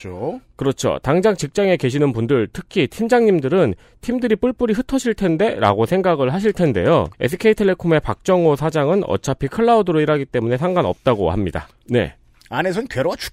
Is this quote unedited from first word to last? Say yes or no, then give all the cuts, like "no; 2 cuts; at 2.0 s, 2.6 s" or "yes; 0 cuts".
no; 2 cuts; at 7.1 s, 11.8 s